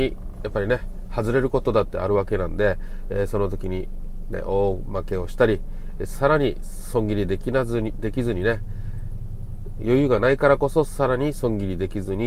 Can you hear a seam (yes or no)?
no